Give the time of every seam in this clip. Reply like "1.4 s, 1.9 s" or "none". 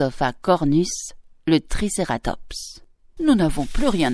3.2 s